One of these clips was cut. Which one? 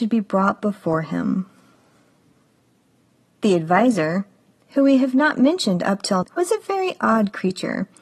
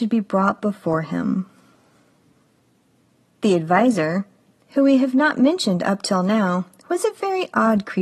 first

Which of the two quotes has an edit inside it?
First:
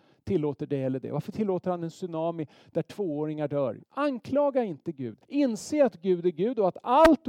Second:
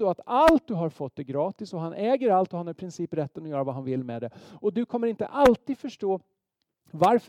first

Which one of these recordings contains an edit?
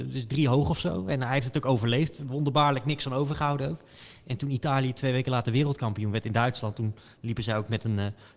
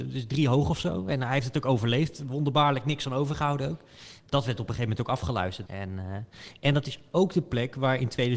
second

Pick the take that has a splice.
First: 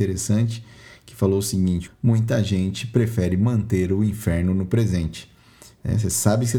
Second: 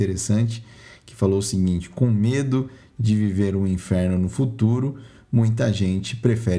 first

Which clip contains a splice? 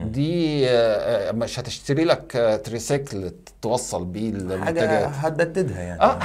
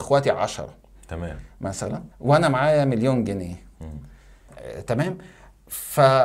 second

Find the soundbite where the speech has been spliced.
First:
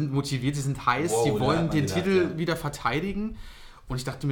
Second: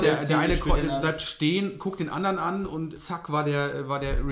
second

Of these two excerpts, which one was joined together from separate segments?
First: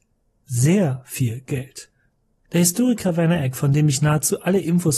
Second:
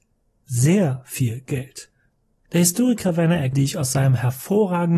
second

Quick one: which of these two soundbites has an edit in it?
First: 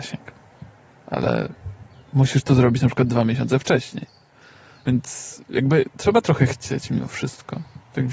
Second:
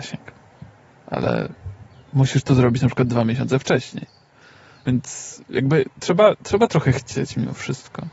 first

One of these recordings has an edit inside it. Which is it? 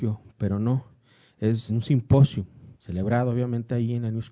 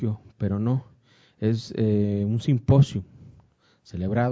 first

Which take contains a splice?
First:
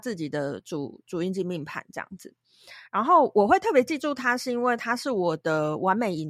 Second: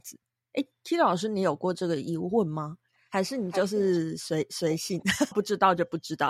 second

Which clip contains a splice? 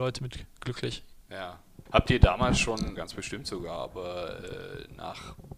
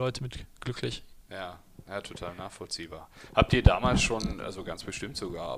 first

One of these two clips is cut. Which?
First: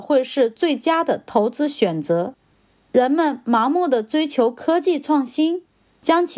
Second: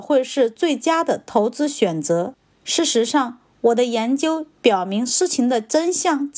second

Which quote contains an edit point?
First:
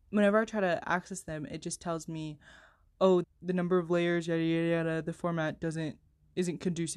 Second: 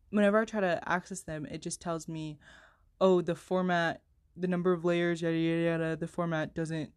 first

